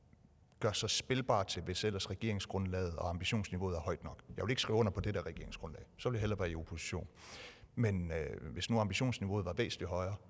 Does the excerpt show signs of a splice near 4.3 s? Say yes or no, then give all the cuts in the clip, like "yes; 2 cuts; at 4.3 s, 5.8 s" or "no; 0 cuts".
no; 1 cut; at 1.5 s